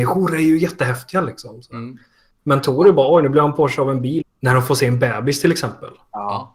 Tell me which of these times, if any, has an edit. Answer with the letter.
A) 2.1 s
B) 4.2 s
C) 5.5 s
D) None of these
B